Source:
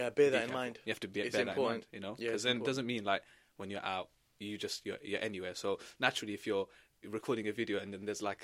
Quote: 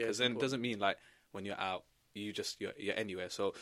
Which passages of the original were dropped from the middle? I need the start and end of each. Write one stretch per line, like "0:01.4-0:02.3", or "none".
none